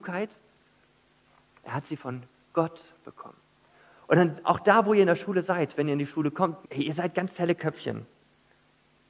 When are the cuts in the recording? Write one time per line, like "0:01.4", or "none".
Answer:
0:06.6